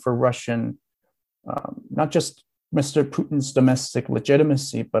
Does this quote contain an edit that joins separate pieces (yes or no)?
no